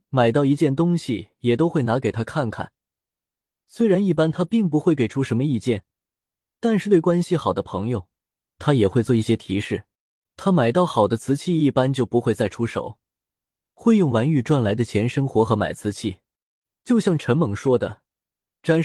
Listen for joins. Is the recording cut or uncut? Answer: uncut